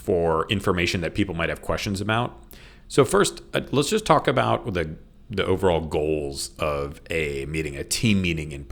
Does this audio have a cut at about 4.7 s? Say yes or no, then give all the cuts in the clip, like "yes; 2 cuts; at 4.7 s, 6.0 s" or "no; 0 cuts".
no; 1 cut; at 2.8 s